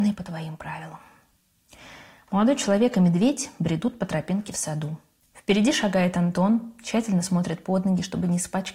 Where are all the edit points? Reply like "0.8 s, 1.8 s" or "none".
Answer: none